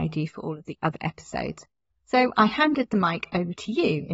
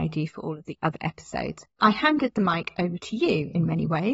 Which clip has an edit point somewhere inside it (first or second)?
second